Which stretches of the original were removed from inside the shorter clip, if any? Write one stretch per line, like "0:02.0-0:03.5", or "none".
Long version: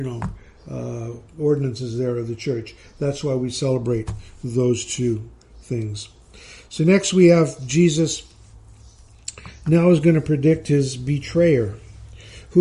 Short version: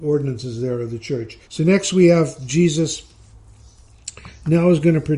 0:02.8-0:06.6